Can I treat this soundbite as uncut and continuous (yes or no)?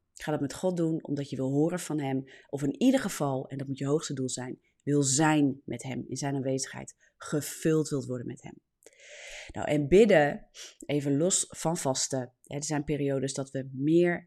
yes